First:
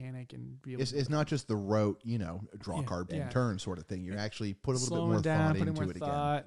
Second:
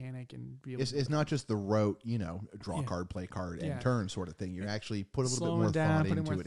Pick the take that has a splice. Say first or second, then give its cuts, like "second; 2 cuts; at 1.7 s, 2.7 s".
first; 1 cut; at 3.1 s